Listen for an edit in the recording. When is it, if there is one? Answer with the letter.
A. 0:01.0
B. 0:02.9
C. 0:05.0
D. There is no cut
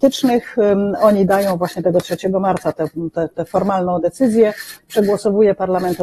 D